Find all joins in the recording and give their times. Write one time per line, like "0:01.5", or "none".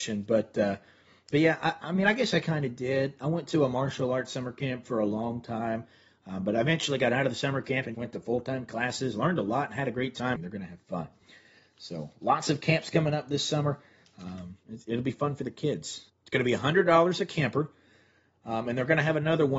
0:07.9
0:10.4
0:16.1